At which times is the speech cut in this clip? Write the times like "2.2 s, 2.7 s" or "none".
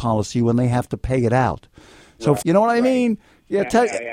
2.4 s

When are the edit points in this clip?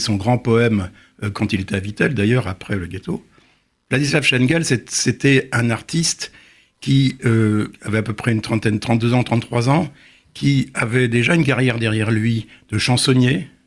3.8 s

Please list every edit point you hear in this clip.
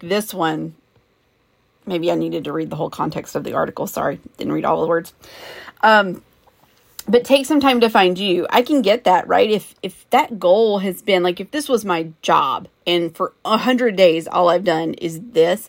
12.8 s

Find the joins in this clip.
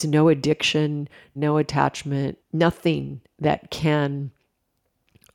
1.4 s, 2.4 s

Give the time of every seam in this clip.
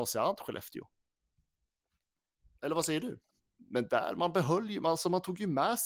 3.4 s

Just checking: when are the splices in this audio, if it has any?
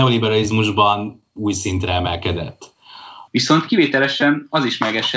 3.3 s

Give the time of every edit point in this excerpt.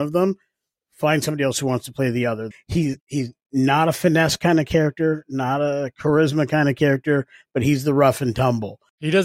2.5 s

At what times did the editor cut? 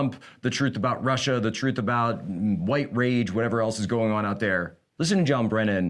none

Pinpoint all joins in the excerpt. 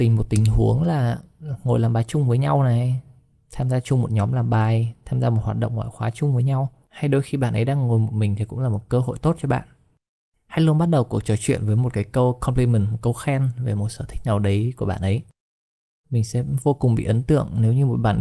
none

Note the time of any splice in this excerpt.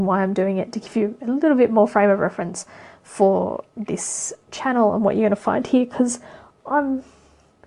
6.6 s

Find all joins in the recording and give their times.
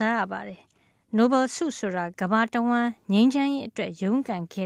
2.1 s

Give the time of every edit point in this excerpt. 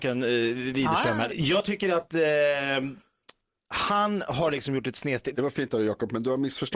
1.3 s, 5.3 s

